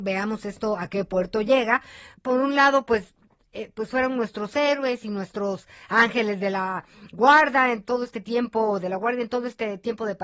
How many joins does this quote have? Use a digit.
1